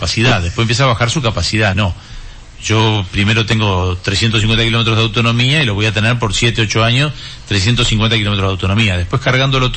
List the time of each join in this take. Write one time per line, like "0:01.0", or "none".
0:01.7